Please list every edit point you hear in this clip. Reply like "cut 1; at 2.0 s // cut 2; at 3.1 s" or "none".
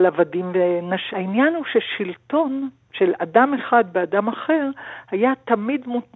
cut 1; at 1.1 s